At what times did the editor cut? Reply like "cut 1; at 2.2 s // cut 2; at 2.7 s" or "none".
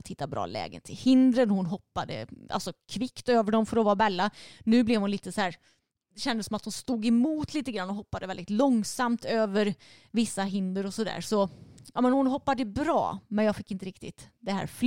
none